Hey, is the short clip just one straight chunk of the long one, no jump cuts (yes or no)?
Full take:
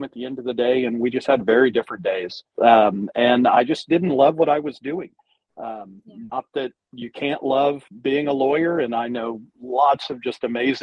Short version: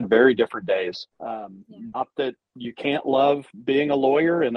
no